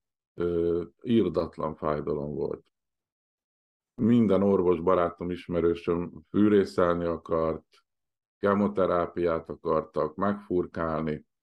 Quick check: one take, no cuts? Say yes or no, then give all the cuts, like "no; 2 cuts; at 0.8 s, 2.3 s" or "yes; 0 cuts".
yes; 0 cuts